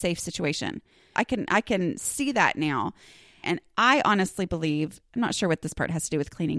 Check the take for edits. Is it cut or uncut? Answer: cut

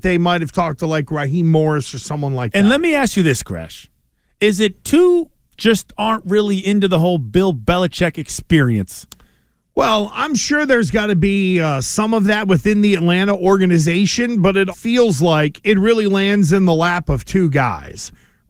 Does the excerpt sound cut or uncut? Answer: cut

